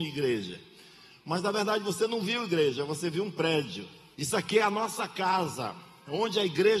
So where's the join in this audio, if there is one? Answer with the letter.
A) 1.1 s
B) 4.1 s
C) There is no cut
B